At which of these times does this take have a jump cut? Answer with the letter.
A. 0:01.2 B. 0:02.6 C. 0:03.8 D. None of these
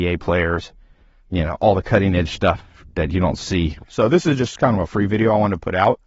C